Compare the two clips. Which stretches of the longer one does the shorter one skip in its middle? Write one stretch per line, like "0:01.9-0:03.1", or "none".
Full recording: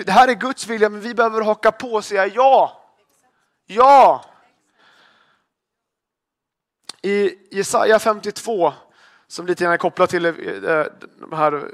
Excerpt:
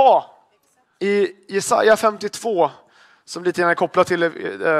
0:03.5-0:07.0